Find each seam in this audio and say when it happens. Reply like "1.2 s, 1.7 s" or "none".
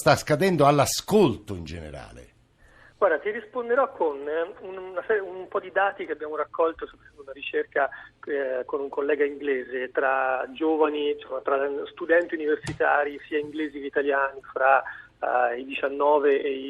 none